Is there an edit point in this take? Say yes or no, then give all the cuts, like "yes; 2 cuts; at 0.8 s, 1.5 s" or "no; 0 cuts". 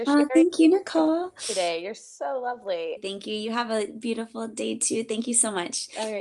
yes; 1 cut; at 3.0 s